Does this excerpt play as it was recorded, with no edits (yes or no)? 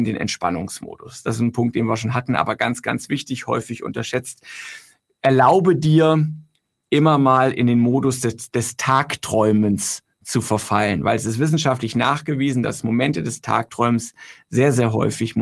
yes